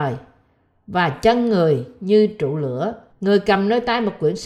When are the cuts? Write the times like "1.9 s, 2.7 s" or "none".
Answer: 3.1 s

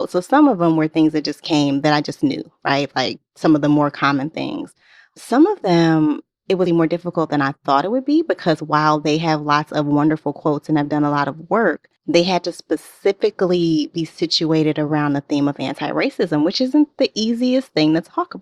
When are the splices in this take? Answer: 6.7 s, 12.0 s

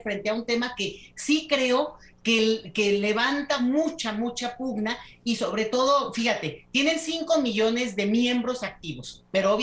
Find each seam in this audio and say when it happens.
none

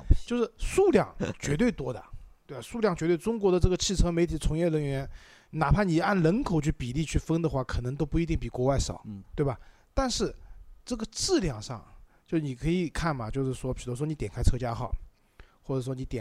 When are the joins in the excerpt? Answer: 9.2 s

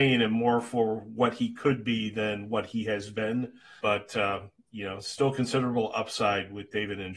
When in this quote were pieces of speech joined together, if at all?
3.8 s

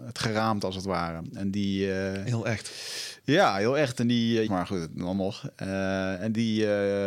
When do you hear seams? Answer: 4.5 s

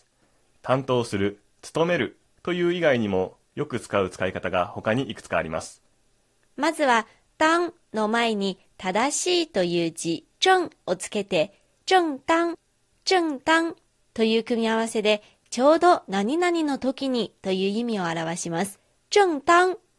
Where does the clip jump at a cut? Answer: 10.3 s, 19.0 s

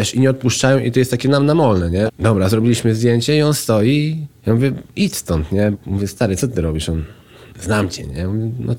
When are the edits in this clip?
2.1 s, 5.7 s

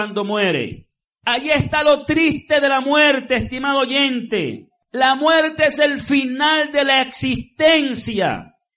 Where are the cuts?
none

